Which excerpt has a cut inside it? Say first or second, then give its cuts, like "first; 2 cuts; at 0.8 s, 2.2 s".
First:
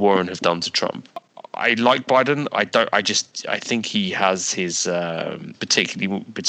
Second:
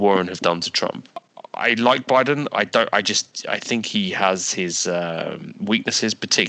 first; 1 cut; at 5.5 s